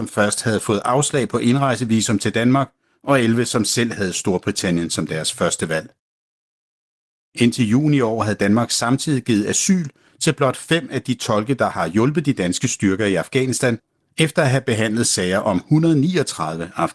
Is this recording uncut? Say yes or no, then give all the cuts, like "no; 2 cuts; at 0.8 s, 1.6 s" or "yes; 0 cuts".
yes; 0 cuts